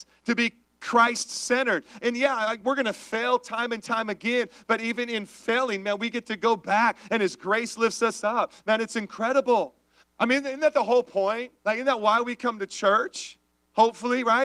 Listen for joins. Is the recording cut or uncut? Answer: cut